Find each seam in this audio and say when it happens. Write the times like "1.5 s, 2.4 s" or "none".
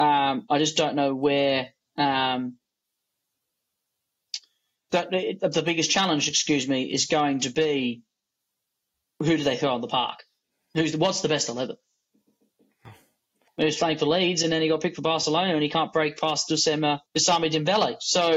13.5 s, 17.1 s